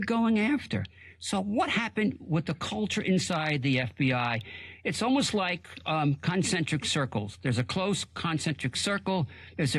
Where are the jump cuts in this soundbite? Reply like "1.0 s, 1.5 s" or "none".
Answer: none